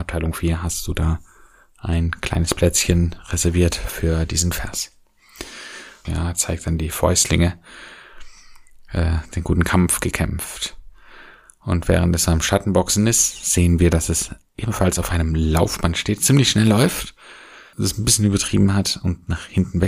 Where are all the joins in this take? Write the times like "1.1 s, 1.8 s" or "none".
6.1 s, 17.7 s